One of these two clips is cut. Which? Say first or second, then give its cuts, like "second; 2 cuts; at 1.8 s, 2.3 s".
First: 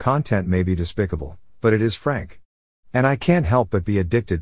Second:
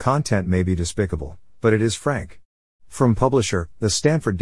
second; 1 cut; at 2.7 s